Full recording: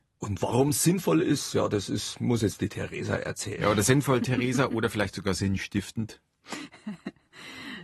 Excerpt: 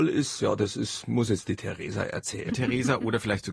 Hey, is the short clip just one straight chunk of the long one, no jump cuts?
no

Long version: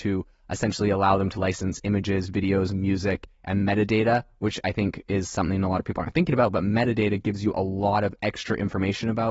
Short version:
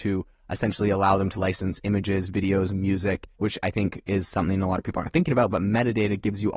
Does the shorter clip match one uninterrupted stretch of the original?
no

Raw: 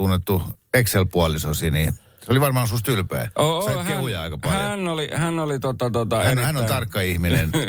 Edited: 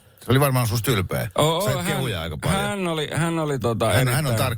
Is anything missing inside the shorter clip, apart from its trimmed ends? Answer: yes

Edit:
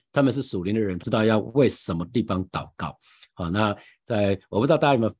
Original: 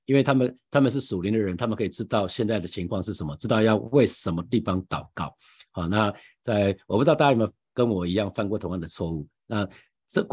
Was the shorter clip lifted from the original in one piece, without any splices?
no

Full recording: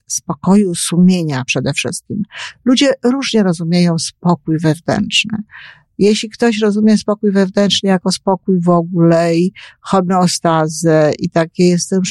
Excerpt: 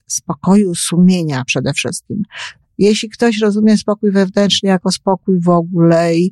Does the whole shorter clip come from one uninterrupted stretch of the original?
no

